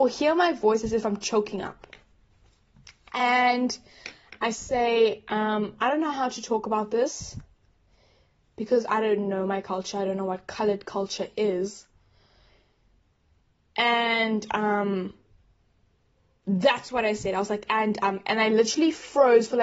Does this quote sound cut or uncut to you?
uncut